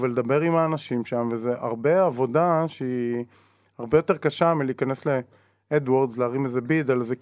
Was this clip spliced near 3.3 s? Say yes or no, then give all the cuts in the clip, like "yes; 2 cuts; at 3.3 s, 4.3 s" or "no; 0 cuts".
no; 0 cuts